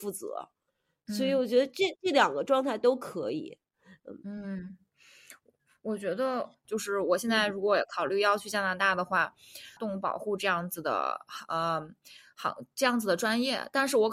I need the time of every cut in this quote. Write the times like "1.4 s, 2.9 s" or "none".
6.6 s, 9.8 s